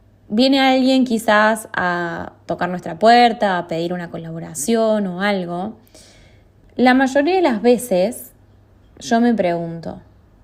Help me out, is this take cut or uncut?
cut